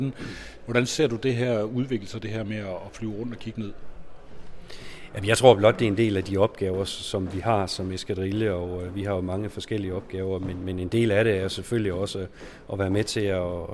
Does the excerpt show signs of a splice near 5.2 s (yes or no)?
no